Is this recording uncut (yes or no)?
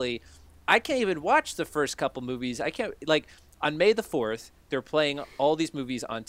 yes